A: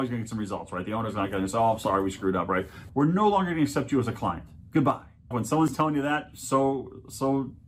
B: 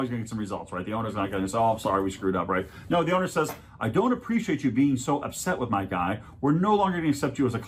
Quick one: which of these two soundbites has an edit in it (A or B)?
A